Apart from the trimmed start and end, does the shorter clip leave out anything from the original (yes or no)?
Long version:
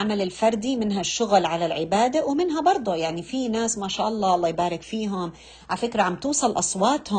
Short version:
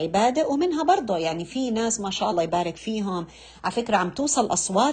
yes